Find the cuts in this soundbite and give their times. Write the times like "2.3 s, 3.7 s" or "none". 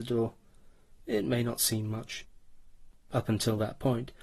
2.9 s